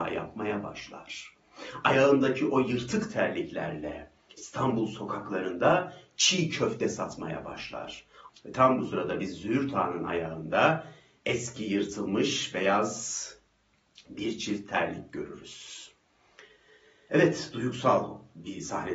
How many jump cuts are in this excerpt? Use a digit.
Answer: 1